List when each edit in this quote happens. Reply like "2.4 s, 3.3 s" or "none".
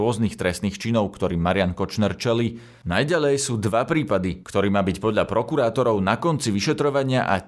4.4 s